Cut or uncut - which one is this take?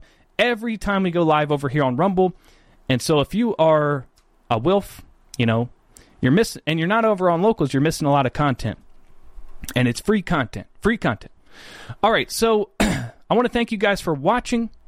uncut